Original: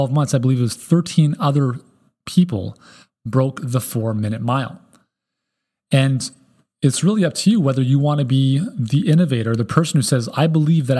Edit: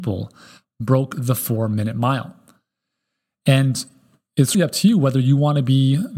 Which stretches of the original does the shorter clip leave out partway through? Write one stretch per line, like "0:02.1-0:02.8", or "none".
0:07.0-0:07.2